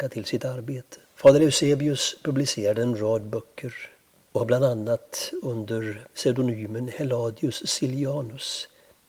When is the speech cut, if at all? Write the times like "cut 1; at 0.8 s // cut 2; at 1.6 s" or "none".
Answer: cut 1; at 1.1 s